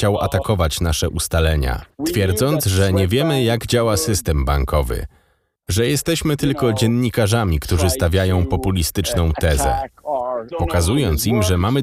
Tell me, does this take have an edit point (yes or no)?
yes